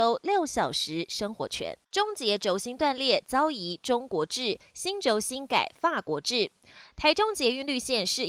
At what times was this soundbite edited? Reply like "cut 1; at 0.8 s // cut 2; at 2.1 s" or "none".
cut 1; at 1.8 s